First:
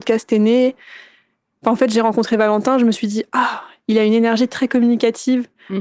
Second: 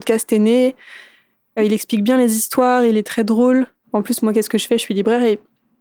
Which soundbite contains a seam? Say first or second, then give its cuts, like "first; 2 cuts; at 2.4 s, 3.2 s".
second; 2 cuts; at 1.6 s, 3.8 s